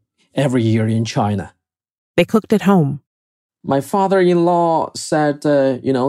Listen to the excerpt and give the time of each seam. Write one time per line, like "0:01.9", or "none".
0:02.0
0:03.5